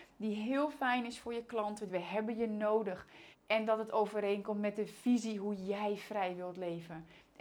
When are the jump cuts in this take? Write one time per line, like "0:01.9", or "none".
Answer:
0:01.9
0:03.3